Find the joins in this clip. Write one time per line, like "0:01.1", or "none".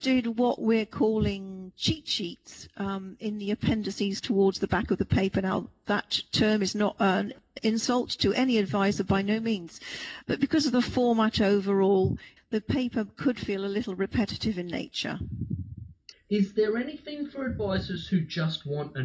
0:10.2
0:12.4
0:16.1